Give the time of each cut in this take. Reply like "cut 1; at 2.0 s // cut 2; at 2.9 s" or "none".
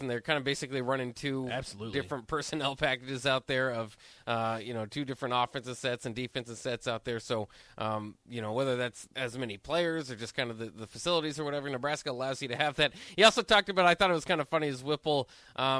cut 1; at 9.1 s